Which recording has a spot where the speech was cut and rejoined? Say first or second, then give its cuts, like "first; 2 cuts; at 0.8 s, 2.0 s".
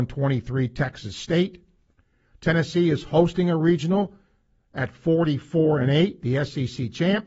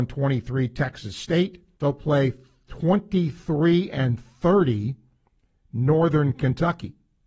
second; 1 cut; at 1.8 s